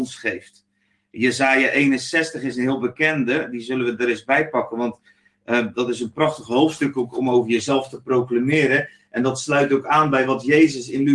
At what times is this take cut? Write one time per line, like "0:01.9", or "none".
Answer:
none